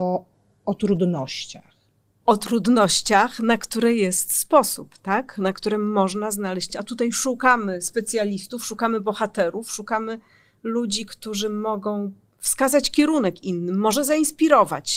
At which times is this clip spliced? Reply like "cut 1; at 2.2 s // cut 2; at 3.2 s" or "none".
cut 1; at 2.2 s // cut 2; at 6.7 s